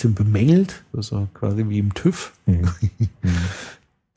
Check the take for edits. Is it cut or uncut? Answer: cut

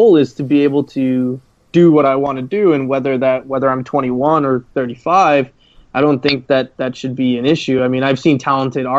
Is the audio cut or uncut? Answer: uncut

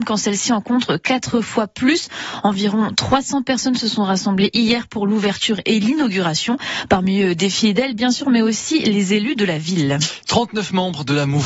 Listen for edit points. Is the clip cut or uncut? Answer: uncut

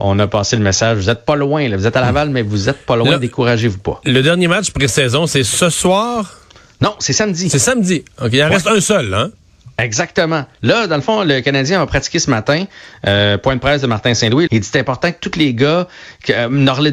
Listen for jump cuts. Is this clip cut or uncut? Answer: cut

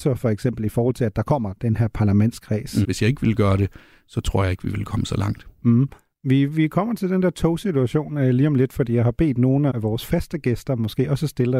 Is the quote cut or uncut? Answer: cut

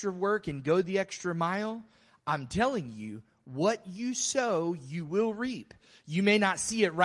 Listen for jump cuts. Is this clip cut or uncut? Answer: uncut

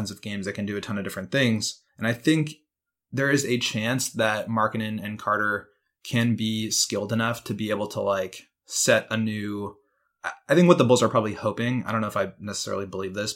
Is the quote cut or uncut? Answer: cut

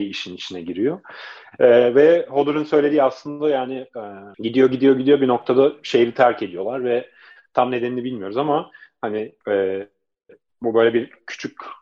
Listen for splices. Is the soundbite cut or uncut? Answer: cut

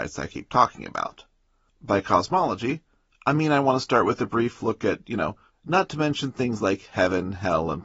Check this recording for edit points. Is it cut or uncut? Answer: cut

